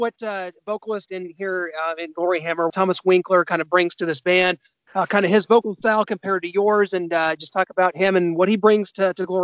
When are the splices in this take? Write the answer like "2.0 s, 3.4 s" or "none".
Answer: 2.7 s